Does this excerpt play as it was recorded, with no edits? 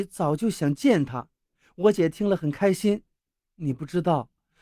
yes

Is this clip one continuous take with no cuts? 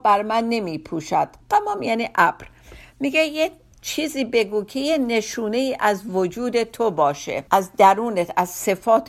no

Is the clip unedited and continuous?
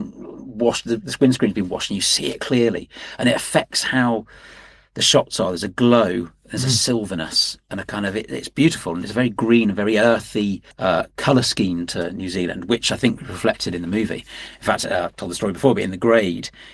no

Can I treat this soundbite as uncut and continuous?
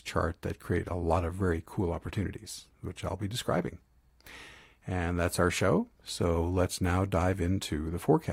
yes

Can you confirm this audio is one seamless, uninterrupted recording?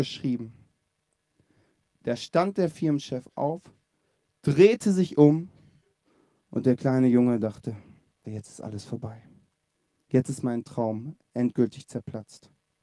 no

